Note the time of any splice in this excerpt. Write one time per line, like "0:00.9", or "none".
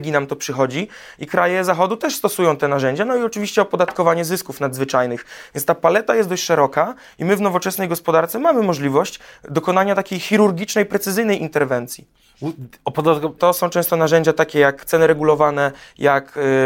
0:13.4